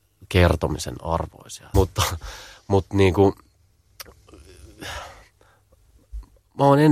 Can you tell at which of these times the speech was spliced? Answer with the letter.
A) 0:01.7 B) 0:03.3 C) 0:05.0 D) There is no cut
A